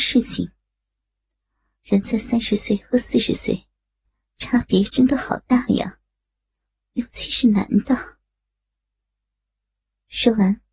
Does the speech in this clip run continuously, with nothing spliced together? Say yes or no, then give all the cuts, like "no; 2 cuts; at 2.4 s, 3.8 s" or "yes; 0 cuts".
yes; 0 cuts